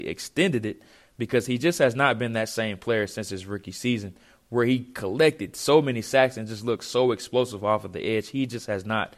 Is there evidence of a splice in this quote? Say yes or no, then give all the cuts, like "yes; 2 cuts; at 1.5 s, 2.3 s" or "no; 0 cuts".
no; 0 cuts